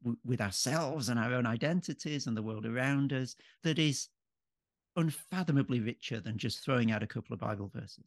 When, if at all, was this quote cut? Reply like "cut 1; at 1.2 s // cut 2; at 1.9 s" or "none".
cut 1; at 3.6 s

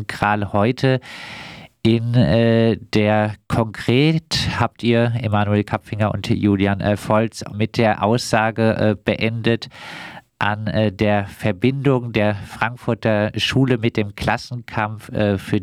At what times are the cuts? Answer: cut 1; at 7.5 s

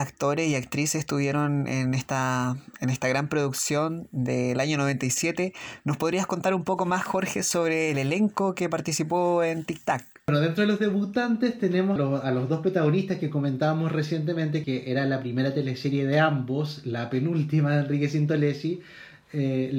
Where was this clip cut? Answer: cut 1; at 12.0 s // cut 2; at 14.6 s

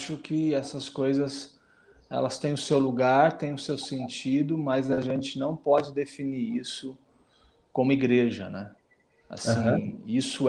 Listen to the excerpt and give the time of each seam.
none

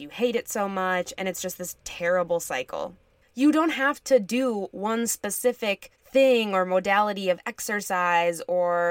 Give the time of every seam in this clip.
cut 1; at 3.2 s // cut 2; at 5.9 s

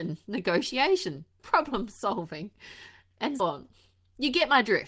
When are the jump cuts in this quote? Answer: cut 1; at 1.4 s // cut 2; at 3.4 s

